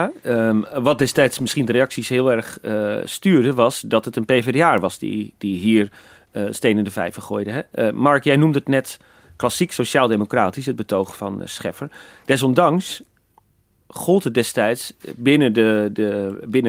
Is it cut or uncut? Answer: uncut